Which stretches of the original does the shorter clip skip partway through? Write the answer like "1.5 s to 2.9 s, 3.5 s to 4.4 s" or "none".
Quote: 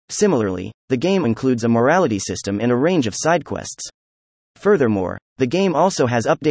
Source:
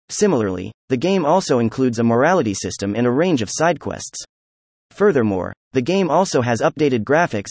1.2 s to 1.6 s